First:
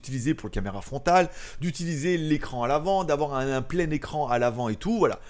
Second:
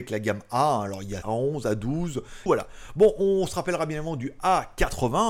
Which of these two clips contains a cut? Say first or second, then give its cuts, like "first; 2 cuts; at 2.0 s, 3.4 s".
second; 2 cuts; at 1.2 s, 2.5 s